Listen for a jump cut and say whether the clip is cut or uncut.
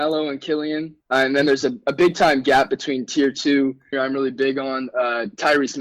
cut